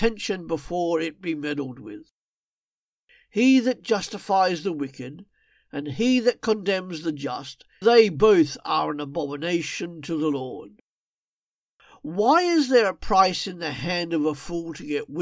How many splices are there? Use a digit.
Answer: 1